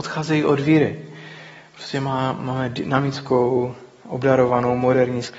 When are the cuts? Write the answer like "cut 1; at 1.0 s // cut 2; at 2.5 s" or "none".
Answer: none